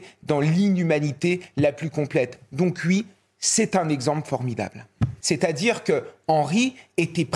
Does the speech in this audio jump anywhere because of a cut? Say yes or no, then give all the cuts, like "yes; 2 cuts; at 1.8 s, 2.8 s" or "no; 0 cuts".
yes; 1 cut; at 5.2 s